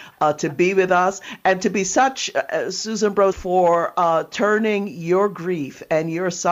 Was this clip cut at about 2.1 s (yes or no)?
no